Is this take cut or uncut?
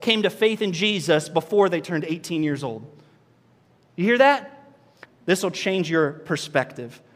cut